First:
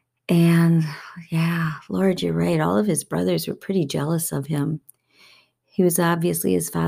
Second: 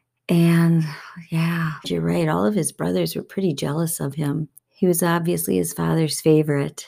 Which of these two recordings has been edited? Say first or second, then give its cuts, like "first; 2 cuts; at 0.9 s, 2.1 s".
second; 2 cuts; at 1.8 s, 4.6 s